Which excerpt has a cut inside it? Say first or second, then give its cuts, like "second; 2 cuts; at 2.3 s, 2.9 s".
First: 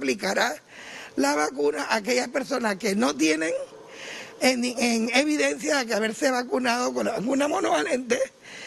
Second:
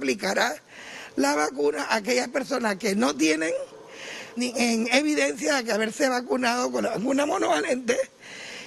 second; 1 cut; at 4.4 s